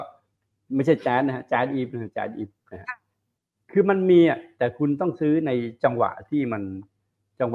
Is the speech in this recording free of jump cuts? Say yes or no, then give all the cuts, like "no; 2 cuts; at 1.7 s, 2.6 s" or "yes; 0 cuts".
yes; 0 cuts